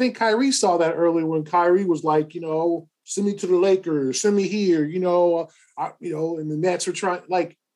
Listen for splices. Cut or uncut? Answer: uncut